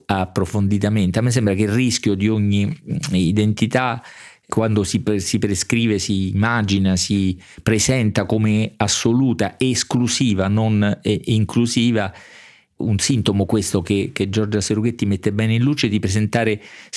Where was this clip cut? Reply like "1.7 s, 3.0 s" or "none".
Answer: none